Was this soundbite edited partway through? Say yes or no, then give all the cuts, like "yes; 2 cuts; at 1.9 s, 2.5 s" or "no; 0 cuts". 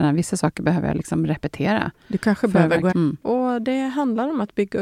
yes; 1 cut; at 2.9 s